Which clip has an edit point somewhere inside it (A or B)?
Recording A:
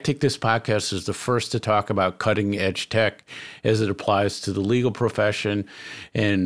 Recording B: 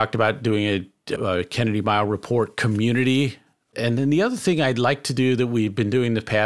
B